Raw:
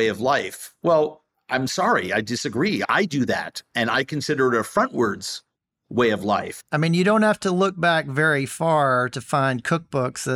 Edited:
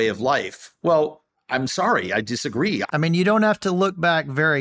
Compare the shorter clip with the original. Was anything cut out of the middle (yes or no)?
yes